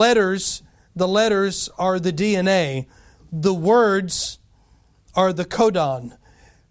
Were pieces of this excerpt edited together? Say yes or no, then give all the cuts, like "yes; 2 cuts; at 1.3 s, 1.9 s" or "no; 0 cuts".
no; 0 cuts